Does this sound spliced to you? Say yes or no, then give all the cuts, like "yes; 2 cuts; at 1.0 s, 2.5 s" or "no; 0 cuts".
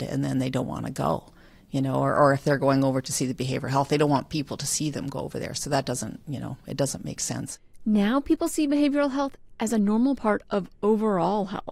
no; 0 cuts